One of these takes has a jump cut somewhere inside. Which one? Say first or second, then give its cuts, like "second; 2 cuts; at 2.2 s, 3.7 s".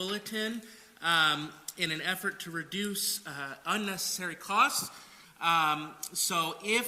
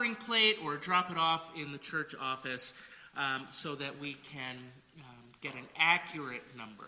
first; 1 cut; at 5.2 s